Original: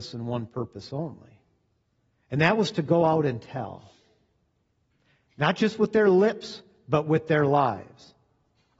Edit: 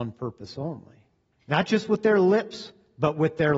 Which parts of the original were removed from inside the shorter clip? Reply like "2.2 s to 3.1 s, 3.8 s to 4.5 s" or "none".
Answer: 1.7 s to 5.2 s